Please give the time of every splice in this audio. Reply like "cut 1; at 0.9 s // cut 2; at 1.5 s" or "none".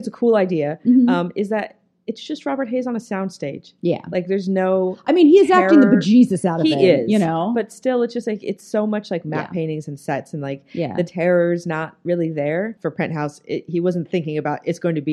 cut 1; at 12.8 s